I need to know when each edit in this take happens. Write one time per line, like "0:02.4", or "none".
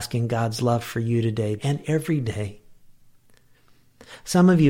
0:01.6